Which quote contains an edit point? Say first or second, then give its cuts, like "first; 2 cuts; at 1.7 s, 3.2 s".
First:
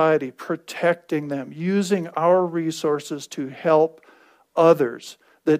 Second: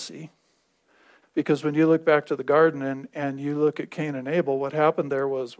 second; 1 cut; at 1.2 s